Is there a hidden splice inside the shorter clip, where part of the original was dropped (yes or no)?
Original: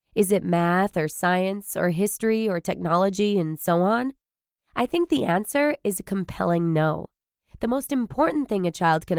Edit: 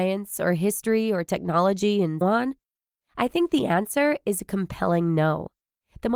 yes